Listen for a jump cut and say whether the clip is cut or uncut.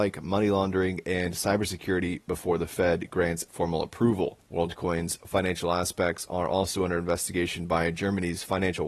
cut